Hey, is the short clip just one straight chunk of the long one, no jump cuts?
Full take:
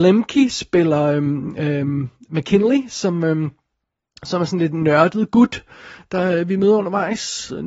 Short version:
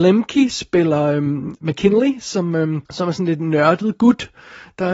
no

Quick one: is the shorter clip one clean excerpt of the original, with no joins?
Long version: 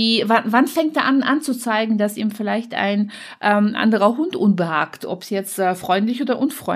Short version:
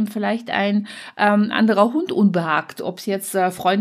yes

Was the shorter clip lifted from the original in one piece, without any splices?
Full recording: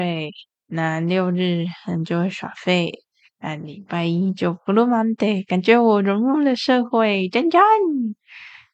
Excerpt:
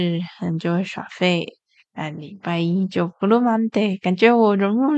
yes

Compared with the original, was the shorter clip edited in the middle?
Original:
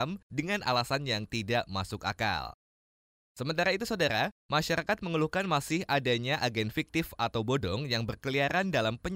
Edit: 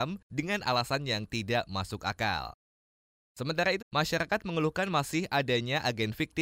yes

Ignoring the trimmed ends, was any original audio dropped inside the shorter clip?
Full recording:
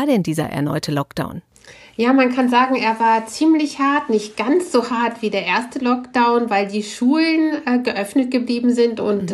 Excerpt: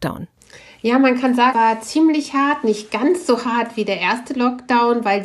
yes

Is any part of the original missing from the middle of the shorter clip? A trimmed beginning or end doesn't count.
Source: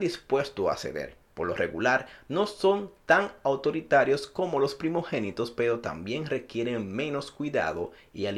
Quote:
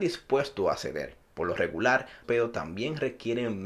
yes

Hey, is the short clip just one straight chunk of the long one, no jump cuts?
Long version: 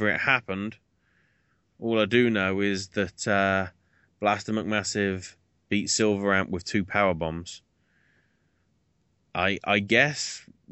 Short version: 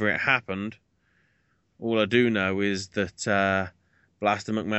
yes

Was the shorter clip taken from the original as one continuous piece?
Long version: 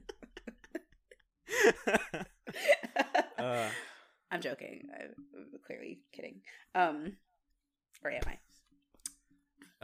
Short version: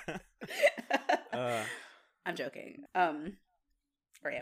no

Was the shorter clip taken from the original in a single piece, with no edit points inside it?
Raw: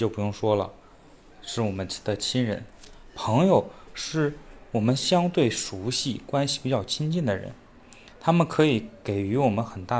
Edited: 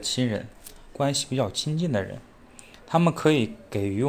no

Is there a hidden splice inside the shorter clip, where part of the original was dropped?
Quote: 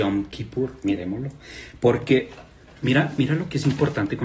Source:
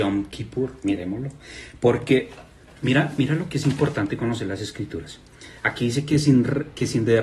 no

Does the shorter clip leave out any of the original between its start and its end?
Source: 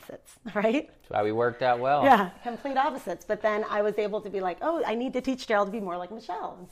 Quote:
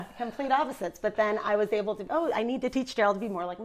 yes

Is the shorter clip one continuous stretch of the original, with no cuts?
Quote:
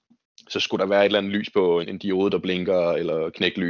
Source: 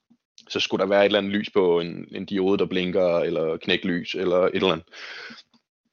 no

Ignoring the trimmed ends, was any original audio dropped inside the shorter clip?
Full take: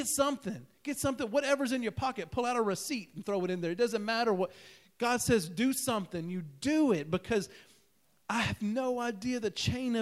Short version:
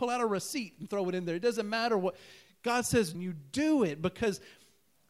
yes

